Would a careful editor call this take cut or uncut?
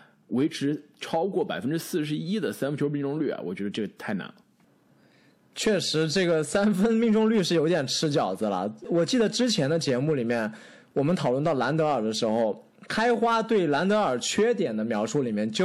uncut